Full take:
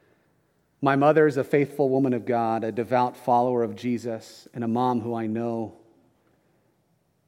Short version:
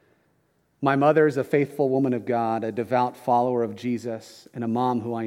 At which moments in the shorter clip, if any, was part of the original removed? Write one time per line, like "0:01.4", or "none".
none